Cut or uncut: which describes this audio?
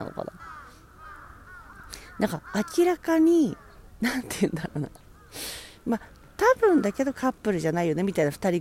uncut